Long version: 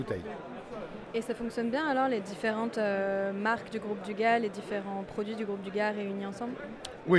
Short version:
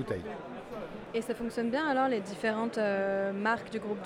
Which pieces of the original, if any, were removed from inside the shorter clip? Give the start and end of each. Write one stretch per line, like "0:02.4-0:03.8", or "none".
none